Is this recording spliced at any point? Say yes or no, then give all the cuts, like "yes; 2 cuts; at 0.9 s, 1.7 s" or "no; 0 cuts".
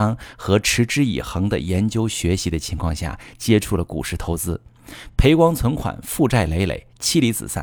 no; 0 cuts